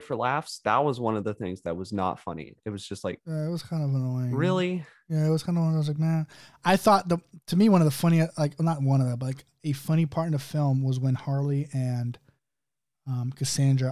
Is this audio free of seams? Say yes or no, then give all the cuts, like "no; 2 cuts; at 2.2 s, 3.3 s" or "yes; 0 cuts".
yes; 0 cuts